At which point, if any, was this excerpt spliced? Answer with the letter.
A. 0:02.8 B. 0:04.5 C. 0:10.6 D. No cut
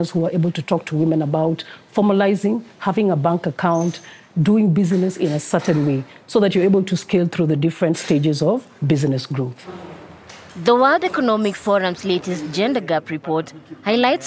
A